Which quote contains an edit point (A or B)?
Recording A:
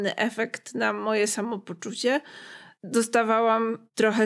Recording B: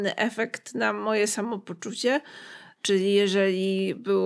B